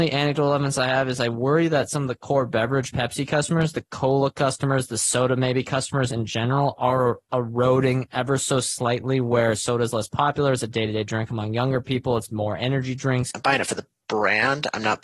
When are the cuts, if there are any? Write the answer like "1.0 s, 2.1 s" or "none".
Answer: 13.3 s